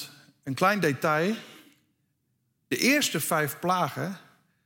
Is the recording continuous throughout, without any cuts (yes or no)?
yes